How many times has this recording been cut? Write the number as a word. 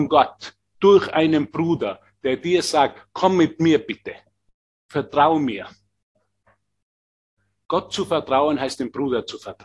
zero